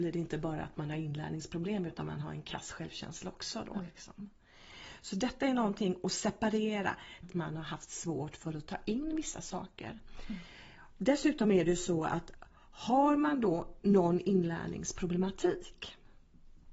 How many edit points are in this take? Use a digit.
1